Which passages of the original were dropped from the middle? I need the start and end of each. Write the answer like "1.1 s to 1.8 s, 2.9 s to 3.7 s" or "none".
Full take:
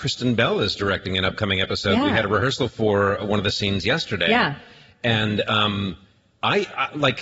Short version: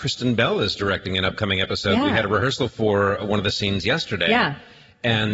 none